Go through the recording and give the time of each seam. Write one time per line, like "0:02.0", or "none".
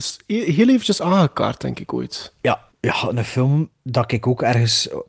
0:02.7